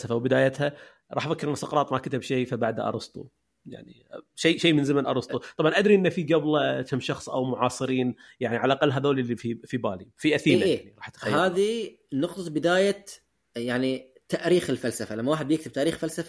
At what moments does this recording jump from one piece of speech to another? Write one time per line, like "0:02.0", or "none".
none